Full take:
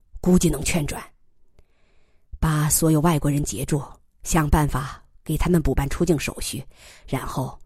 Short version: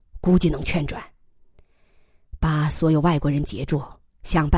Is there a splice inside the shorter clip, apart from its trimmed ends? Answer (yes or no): no